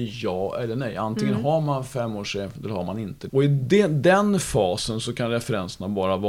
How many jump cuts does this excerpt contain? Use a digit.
1